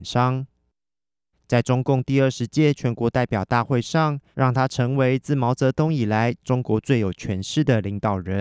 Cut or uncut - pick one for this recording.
cut